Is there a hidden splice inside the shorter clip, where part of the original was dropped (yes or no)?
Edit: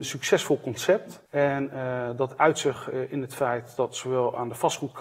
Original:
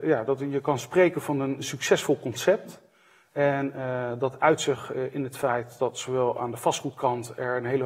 yes